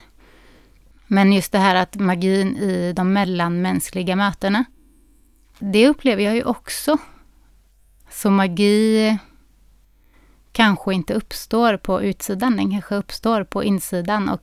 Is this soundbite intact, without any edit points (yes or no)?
no